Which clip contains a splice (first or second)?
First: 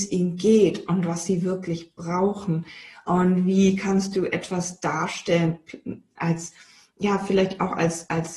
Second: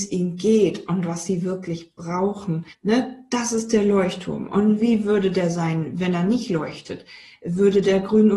second